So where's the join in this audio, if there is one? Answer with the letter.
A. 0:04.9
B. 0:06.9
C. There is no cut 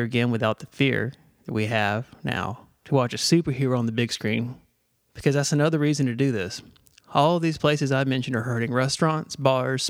A